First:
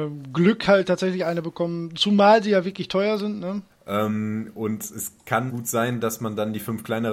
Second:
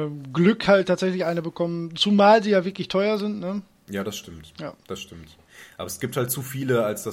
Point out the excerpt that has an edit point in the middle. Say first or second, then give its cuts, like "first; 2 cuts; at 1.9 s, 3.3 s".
first; 2 cuts; at 3.7 s, 5.5 s